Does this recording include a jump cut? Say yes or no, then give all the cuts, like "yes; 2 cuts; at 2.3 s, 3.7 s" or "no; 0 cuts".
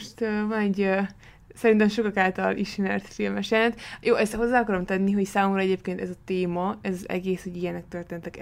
no; 0 cuts